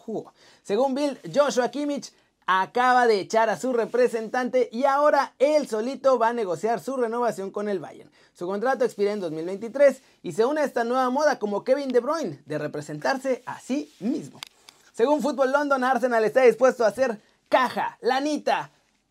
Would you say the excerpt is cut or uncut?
uncut